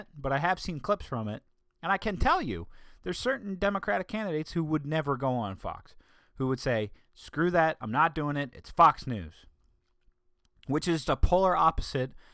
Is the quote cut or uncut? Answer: cut